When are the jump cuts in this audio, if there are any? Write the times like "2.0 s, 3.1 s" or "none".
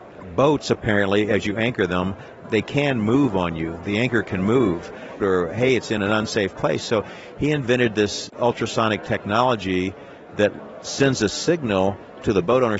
5.2 s